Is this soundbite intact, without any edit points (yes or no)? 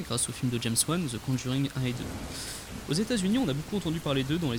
yes